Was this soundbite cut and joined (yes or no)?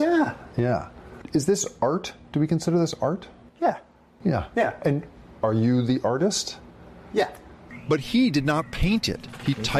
no